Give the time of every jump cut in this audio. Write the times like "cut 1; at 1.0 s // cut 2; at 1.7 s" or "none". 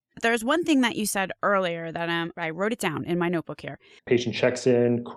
cut 1; at 2.3 s // cut 2; at 4.0 s